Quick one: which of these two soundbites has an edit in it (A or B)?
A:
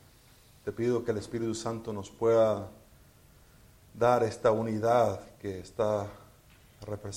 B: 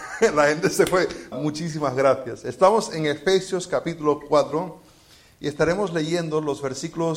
B